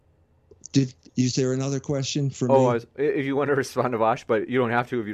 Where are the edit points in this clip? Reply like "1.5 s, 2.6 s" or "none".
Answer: 1.1 s